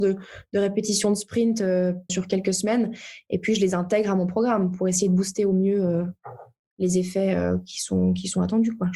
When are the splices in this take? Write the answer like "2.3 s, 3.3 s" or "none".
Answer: 2.1 s